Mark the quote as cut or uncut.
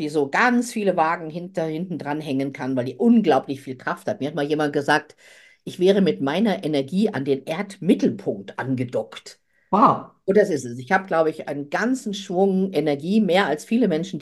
uncut